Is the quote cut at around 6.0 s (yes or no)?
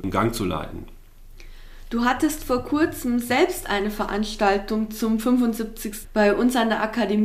yes